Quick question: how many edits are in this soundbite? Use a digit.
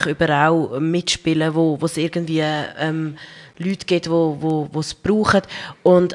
0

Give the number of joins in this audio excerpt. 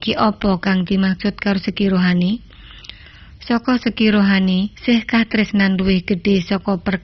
1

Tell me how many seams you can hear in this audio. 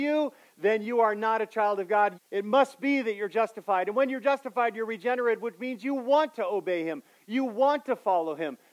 1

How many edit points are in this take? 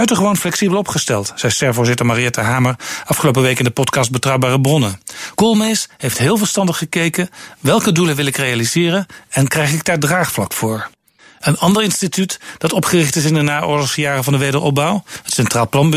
0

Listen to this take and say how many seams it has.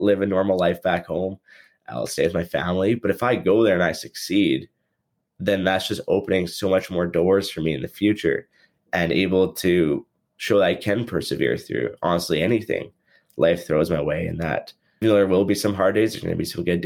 1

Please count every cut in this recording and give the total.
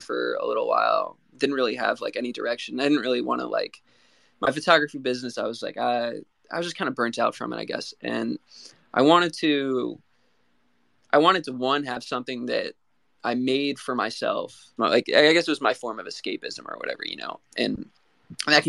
1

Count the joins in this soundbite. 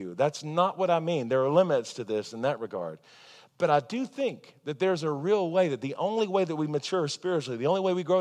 0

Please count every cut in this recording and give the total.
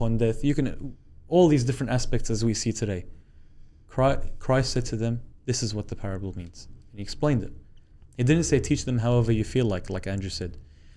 1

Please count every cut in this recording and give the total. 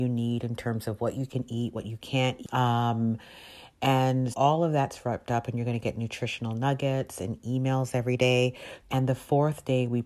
3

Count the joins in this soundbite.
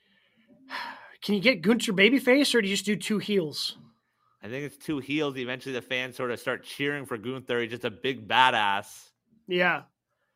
0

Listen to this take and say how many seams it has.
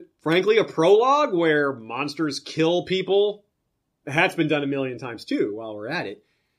0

